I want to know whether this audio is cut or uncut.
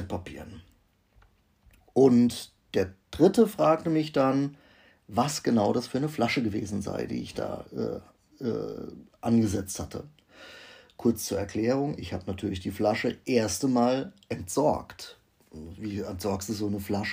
uncut